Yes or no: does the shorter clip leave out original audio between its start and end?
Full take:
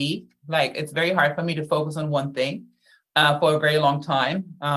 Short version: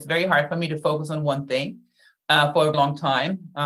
yes